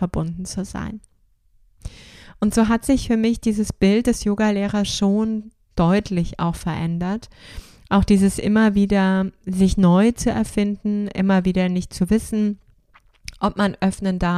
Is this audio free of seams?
yes; 0 cuts

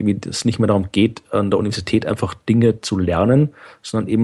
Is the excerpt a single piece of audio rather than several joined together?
yes; 0 cuts

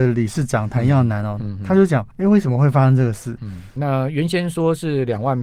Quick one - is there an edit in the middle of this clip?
yes; 2 cuts; at 2.1 s, 3.8 s

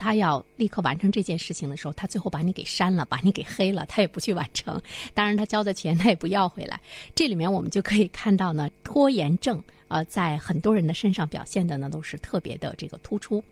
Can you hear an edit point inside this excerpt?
no; 0 cuts

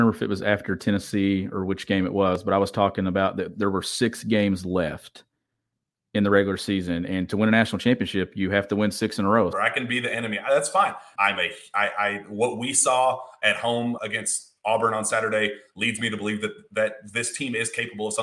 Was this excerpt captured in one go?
no; 3 cuts; at 9.5 s, 11.2 s, 14.0 s

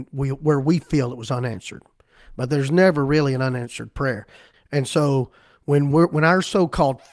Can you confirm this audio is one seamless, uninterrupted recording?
no; 2 cuts; at 4.5 s, 5.9 s

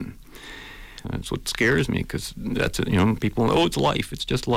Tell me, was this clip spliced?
yes; 1 cut; at 1.0 s

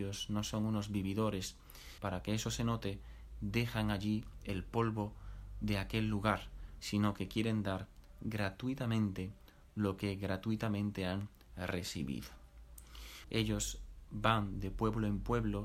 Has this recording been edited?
yes; 3 cuts; at 2.0 s, 6.8 s, 13.2 s

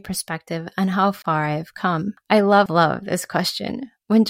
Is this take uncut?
no; 1 cut; at 2.7 s

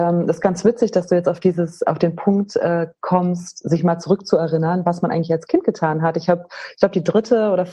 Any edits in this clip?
no; 0 cuts

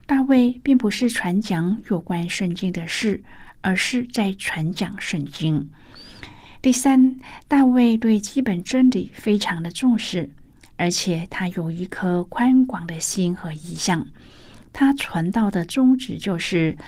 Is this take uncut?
yes; 0 cuts

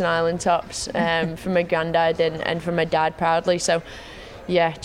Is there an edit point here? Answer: no; 0 cuts

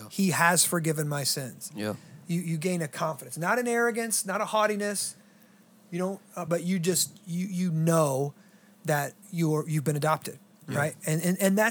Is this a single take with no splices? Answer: no; 2 cuts; at 6.5 s, 9.2 s

